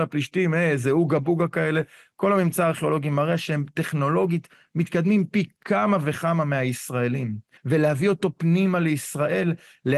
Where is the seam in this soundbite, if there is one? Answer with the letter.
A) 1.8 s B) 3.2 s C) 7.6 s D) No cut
C